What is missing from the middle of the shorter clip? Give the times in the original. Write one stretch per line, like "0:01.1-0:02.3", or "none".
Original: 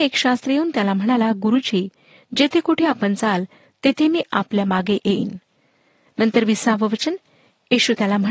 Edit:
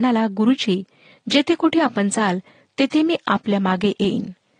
none